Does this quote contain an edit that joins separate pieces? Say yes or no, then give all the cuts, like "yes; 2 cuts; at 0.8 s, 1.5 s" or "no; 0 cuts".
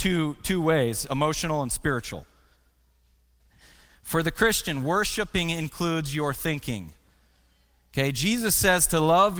yes; 1 cut; at 3.4 s